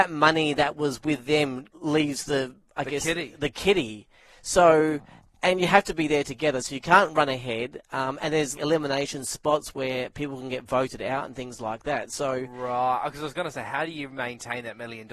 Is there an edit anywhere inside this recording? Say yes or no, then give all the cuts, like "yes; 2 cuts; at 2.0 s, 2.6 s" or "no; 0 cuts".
yes; 2 cuts; at 1.7 s, 8.5 s